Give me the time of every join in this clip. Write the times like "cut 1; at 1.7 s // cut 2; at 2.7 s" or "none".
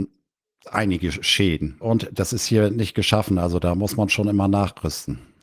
cut 1; at 1.8 s

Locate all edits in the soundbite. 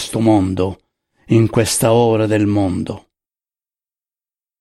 none

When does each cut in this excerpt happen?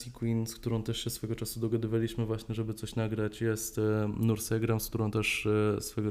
none

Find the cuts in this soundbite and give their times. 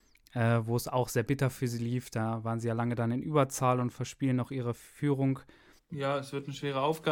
cut 1; at 5.8 s

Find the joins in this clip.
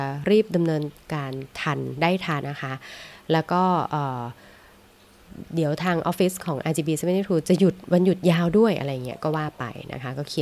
cut 1; at 2.4 s

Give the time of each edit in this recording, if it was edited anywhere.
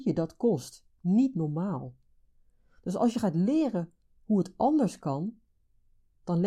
none

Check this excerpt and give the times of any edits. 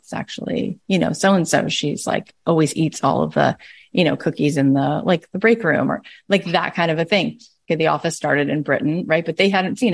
cut 1; at 7.7 s

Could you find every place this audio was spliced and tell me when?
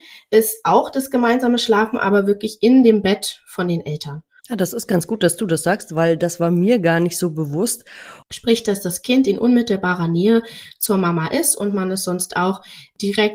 cut 1; at 4.4 s // cut 2; at 8.2 s

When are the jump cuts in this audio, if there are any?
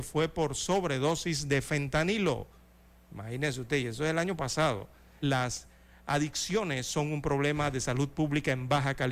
cut 1; at 5.2 s

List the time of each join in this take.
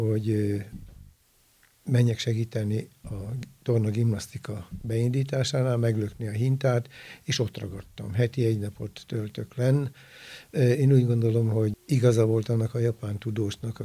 none

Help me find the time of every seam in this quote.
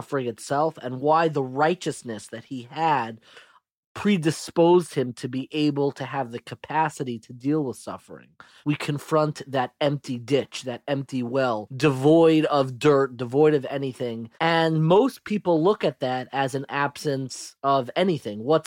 cut 1; at 8.6 s // cut 2; at 14.3 s

